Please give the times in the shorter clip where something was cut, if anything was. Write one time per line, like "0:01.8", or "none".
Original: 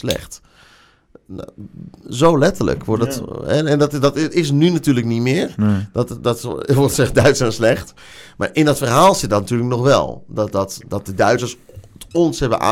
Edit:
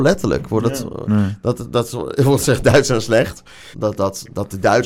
0:01.0
0:03.7